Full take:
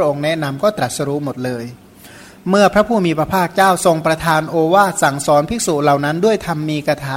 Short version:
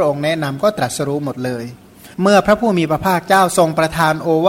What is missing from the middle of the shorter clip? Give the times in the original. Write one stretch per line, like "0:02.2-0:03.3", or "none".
0:02.1-0:02.4